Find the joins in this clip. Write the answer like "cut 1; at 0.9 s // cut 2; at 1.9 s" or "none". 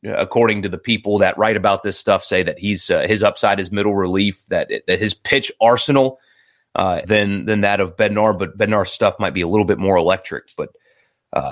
cut 1; at 7.0 s